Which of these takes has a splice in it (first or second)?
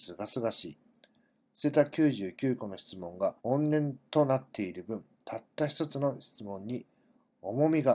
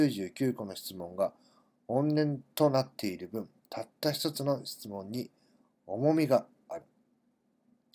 first